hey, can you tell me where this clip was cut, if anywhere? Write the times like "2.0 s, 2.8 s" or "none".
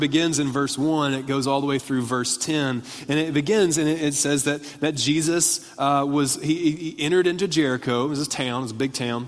none